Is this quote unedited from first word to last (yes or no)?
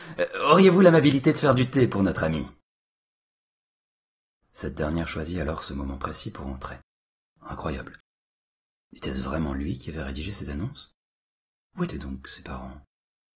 no